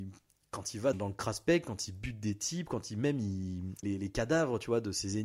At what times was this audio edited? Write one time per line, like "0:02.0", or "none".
0:00.9
0:03.8

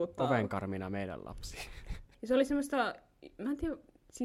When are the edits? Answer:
0:02.1

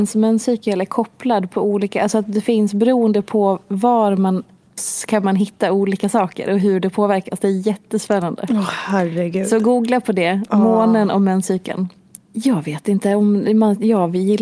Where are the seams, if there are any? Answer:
0:04.8
0:12.2

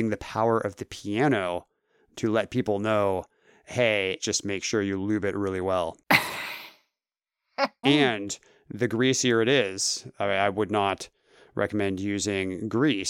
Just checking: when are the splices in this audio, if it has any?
0:04.2
0:07.8

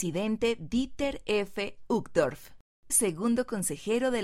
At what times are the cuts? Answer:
0:02.9

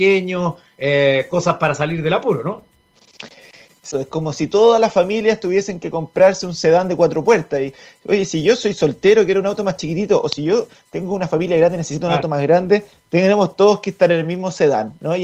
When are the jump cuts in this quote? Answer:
0:03.9

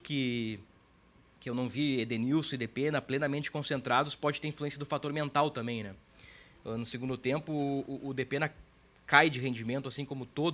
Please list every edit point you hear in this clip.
none

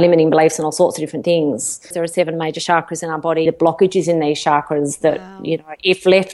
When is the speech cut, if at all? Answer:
0:01.9
0:03.5

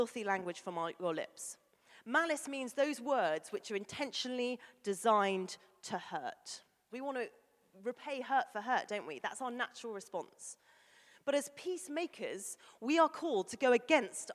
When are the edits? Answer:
0:06.9

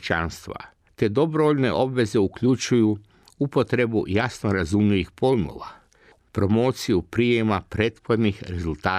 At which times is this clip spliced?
0:06.2

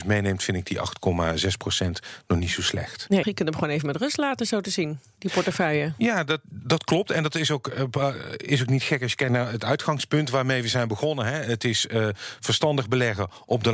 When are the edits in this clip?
0:03.2

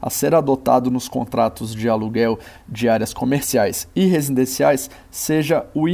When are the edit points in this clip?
none

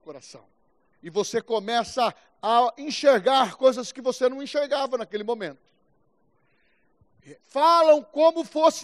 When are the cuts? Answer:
0:00.9
0:07.4

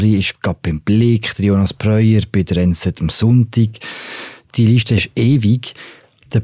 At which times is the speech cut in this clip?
0:04.5

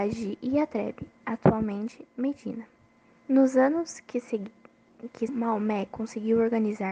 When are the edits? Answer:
0:03.2
0:05.3

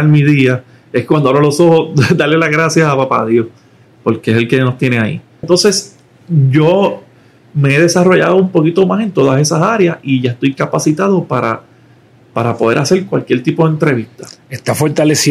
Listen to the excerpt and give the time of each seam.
0:05.4

